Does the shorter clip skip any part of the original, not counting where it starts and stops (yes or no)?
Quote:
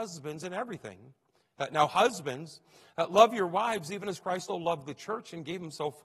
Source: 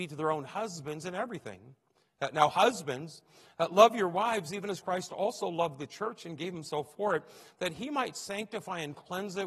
yes